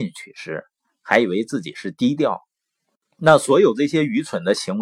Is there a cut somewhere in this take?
no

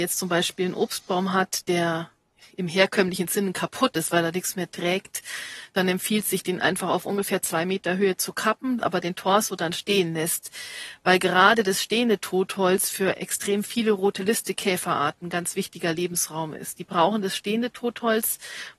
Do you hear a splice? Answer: yes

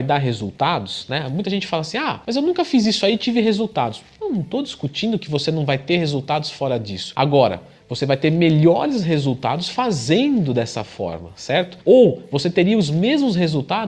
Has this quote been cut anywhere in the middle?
no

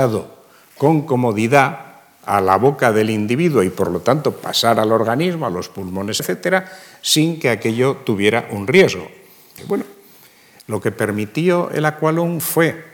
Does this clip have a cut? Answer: yes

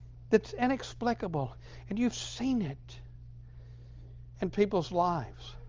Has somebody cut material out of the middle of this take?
no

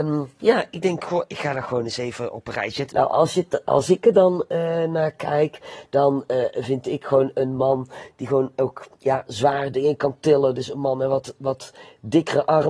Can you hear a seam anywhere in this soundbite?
yes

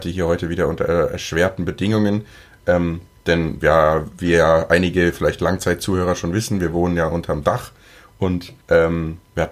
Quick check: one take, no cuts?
no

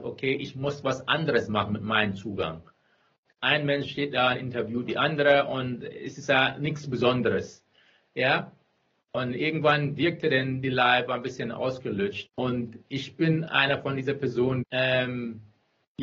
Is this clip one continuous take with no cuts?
no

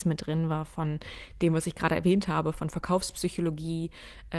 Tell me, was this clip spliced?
no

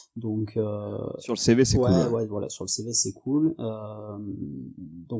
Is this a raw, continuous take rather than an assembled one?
yes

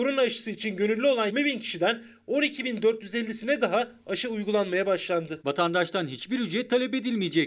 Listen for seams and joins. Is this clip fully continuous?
no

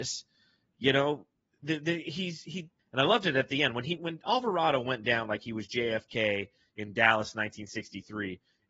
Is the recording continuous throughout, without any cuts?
no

